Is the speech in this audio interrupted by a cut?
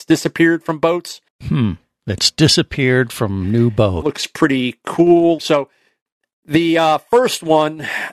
yes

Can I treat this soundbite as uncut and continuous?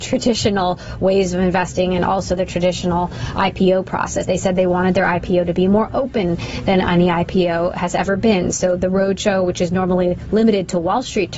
yes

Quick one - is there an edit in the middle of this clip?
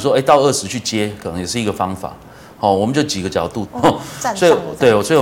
yes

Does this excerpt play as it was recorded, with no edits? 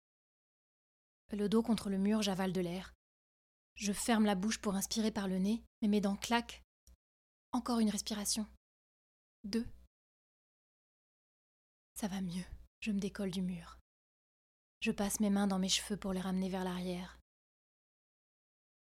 no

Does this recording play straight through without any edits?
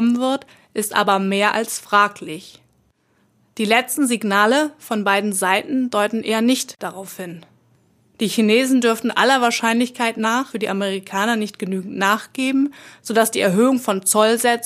yes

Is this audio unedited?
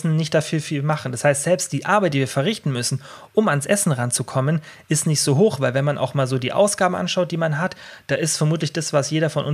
yes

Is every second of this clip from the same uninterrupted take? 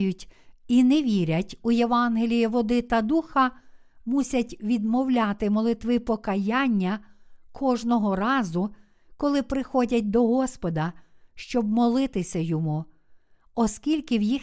yes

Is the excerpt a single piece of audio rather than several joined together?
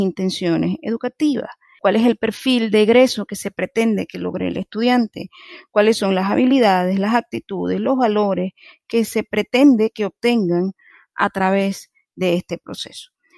no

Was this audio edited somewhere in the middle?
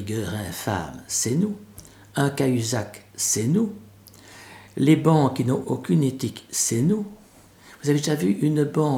yes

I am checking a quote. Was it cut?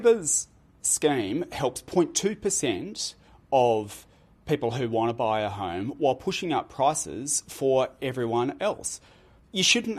no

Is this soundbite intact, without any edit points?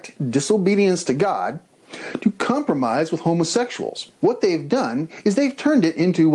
no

